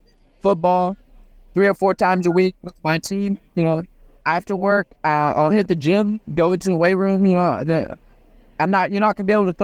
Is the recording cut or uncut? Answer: uncut